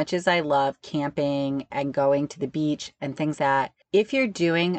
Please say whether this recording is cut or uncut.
cut